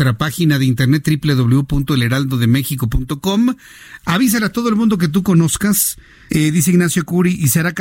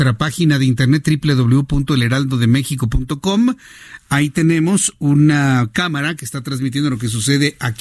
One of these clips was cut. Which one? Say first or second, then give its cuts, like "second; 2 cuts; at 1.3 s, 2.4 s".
first; 2 cuts; at 4.0 s, 6.3 s